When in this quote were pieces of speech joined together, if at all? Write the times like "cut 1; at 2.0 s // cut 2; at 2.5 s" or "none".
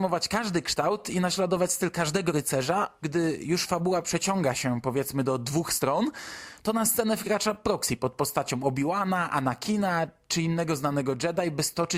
cut 1; at 3.0 s